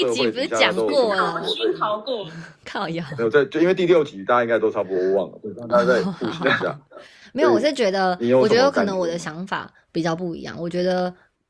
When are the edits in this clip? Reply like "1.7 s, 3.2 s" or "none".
none